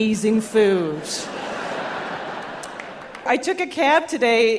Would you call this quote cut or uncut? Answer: cut